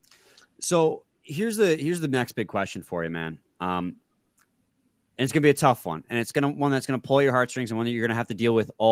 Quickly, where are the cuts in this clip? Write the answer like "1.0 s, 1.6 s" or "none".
none